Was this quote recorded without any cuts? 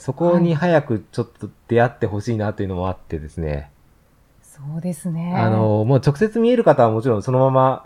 yes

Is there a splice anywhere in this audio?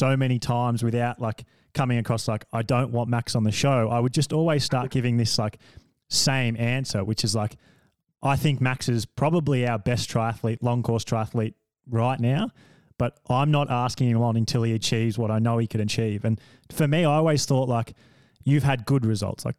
no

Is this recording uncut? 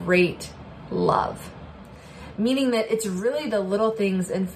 yes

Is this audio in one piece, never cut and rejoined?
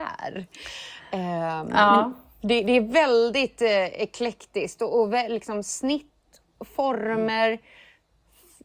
yes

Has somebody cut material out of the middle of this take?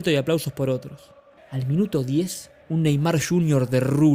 yes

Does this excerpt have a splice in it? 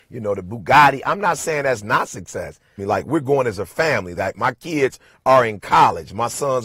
yes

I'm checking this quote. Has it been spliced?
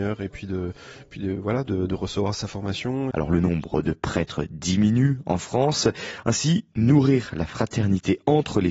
yes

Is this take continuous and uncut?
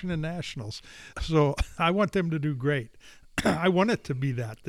no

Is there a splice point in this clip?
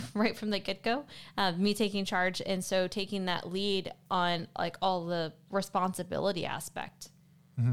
no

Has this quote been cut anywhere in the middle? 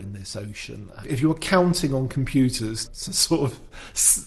yes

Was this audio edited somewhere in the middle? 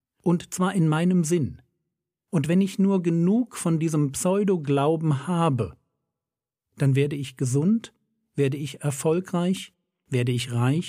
no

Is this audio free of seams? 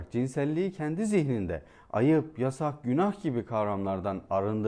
yes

